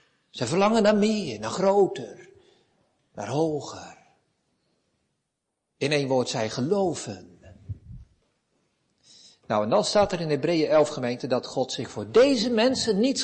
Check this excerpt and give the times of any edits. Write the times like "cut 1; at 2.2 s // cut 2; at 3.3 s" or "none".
none